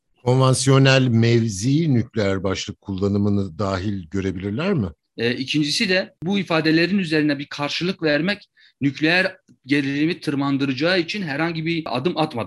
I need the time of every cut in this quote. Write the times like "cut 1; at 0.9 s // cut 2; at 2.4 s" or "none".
cut 1; at 5.0 s